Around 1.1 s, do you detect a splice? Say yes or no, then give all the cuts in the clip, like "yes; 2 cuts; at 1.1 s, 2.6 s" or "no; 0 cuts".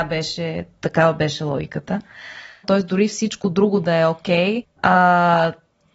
no; 2 cuts; at 2.6 s, 4.6 s